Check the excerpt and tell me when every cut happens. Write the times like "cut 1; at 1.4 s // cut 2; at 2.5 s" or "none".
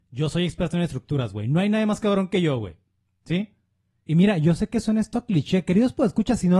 cut 1; at 4.1 s